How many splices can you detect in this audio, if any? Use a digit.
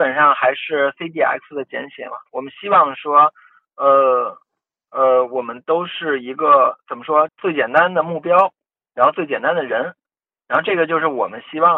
1